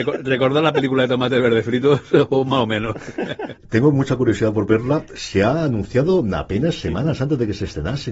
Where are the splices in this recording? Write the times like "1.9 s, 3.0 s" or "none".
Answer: 3.6 s